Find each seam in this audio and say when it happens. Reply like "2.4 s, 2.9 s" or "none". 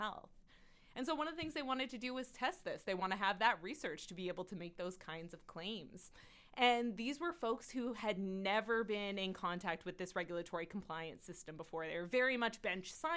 none